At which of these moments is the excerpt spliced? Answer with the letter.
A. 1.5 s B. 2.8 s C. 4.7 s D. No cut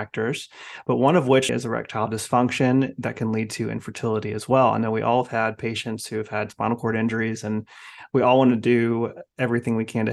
A